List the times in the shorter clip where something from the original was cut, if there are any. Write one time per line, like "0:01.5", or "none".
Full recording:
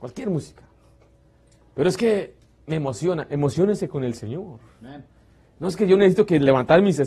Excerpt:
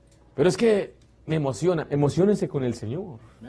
none